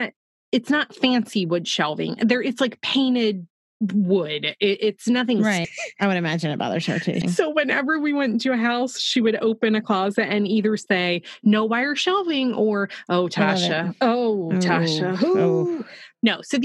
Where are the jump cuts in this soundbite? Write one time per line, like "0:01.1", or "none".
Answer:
0:05.6
0:07.2